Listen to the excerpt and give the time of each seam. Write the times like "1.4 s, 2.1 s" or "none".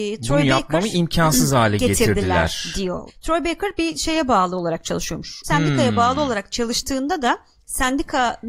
3.1 s, 5.4 s